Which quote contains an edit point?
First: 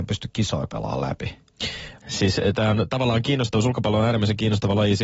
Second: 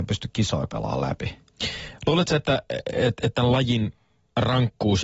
first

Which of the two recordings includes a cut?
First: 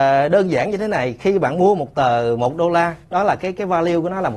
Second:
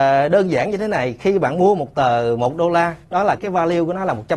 second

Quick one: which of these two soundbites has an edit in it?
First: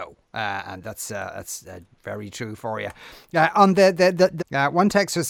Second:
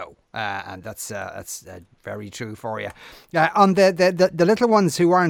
first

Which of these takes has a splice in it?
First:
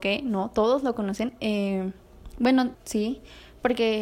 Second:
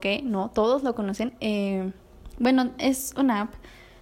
first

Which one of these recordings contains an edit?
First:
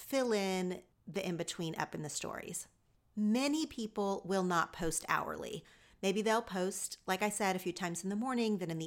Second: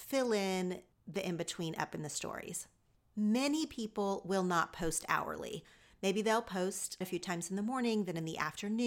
second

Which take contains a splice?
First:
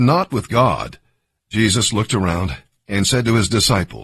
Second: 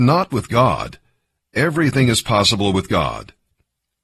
first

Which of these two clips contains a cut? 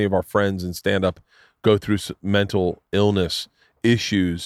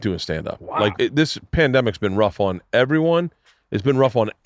second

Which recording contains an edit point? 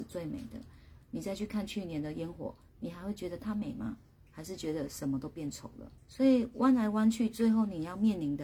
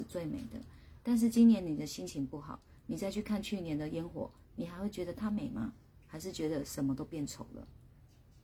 first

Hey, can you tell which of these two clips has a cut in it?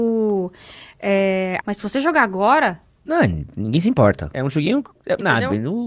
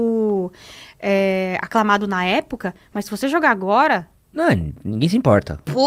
first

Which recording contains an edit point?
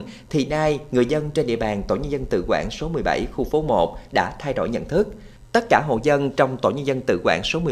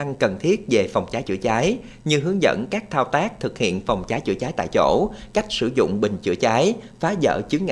first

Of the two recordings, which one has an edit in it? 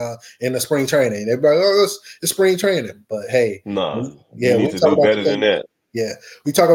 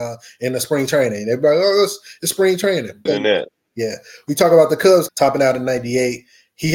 second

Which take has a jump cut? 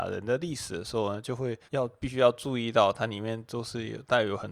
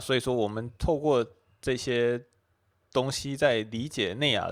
first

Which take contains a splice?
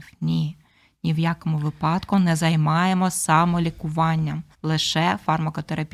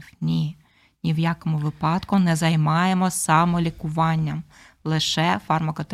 first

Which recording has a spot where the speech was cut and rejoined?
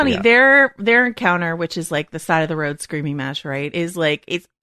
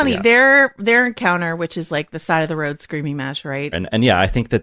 second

